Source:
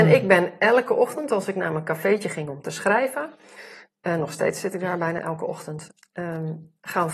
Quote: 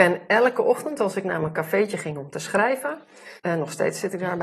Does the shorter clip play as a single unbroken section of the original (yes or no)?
no